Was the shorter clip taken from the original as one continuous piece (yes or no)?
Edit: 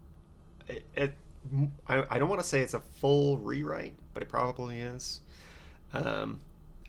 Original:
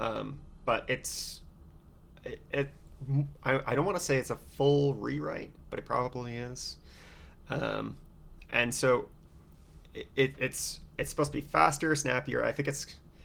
yes